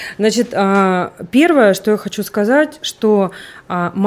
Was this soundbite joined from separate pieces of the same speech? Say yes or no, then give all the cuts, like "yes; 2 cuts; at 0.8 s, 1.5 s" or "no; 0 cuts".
no; 0 cuts